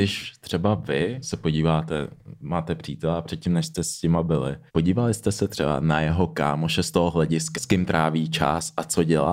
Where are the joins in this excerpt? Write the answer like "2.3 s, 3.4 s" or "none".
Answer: 1.2 s, 4.7 s, 7.5 s